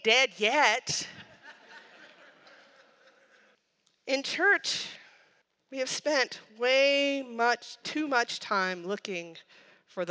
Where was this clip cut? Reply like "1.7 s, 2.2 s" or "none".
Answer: none